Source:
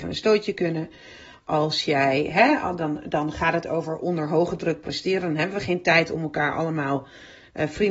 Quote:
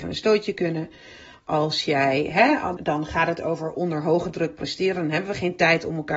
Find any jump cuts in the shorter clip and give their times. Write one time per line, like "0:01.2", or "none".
0:02.8